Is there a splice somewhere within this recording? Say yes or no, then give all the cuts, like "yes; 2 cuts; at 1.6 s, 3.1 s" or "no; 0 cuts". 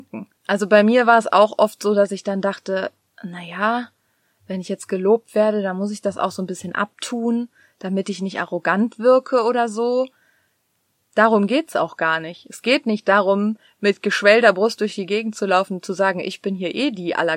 no; 0 cuts